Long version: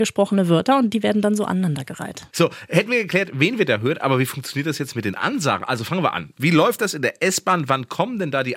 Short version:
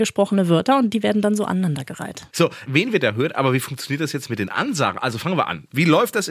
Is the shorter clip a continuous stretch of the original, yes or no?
no